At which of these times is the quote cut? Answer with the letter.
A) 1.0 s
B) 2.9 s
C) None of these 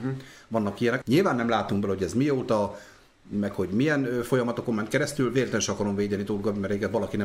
A